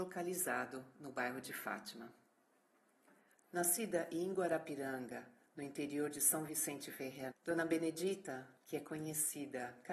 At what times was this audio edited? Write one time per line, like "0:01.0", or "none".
0:03.3
0:07.3
0:08.6